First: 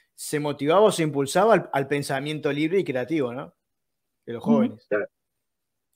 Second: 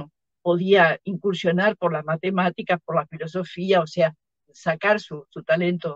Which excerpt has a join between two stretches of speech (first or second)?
second